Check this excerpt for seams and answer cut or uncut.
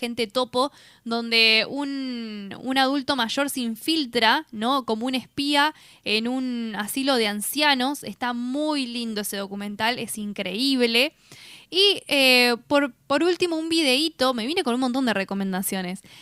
uncut